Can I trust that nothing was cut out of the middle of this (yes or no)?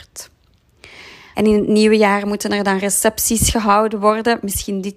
no